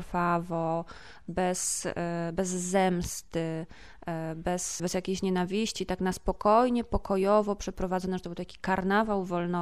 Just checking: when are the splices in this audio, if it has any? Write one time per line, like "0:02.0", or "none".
0:04.8